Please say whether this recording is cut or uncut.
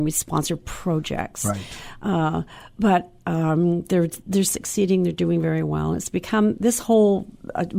uncut